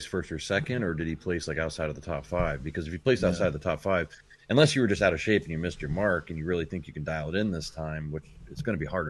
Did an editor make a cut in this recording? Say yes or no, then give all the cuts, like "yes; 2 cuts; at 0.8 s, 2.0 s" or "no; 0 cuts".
no; 0 cuts